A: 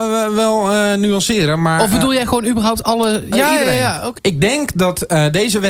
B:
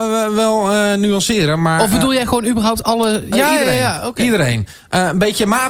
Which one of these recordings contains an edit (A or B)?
A